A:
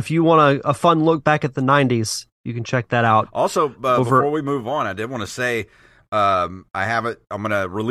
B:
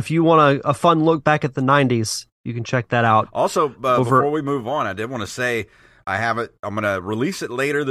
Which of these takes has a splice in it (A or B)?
B